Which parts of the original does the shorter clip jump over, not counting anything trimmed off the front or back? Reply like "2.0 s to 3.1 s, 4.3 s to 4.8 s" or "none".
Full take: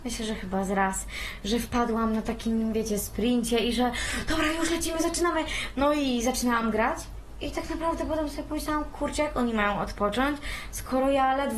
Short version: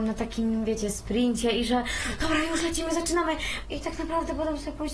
5.7 s to 7.4 s